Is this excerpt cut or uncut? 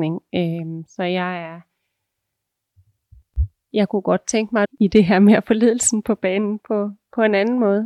cut